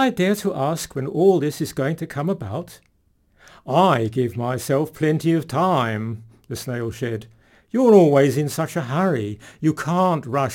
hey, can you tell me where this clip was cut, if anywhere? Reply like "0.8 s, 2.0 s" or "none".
none